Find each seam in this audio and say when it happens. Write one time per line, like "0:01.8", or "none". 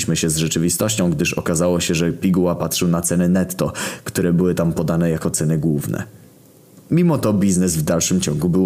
none